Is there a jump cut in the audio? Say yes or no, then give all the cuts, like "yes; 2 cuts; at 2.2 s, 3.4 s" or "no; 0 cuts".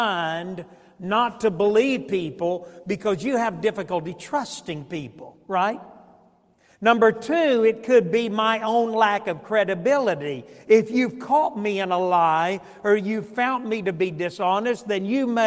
no; 0 cuts